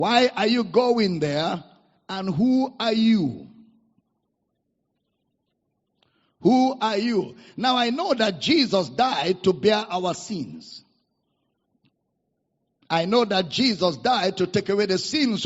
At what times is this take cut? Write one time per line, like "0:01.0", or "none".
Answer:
none